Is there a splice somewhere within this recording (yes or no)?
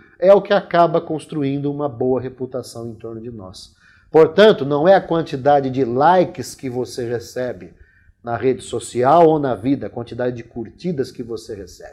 no